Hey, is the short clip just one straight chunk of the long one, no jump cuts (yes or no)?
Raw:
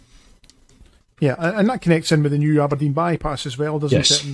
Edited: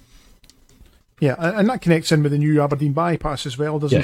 yes